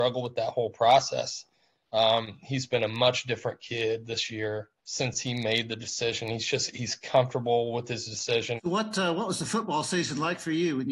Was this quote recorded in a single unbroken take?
no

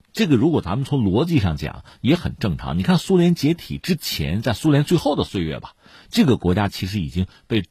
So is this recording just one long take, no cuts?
yes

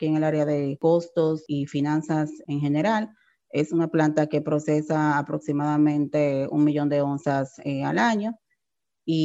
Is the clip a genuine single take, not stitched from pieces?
yes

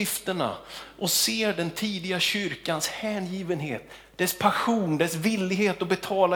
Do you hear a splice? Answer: no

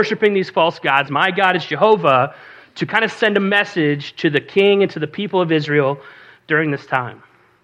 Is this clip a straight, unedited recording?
no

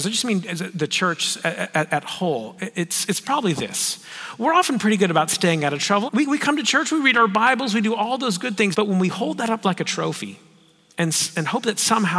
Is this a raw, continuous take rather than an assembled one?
no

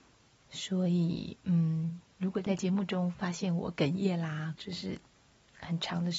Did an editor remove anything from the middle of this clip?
yes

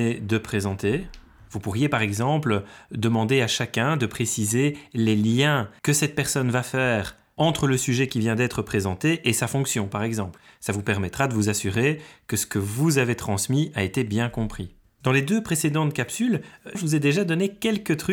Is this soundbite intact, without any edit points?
no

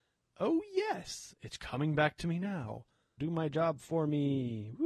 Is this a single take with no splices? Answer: no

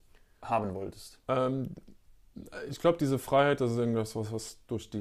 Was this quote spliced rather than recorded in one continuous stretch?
yes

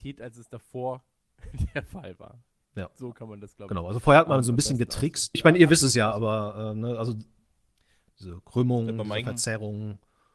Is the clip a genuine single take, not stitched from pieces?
no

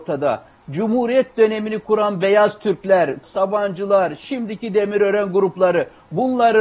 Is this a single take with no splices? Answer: no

